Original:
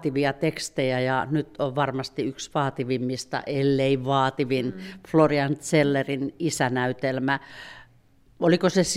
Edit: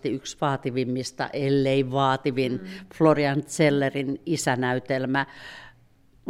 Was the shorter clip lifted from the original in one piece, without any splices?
yes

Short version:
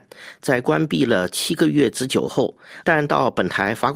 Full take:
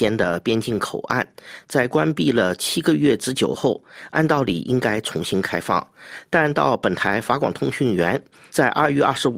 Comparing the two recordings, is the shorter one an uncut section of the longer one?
no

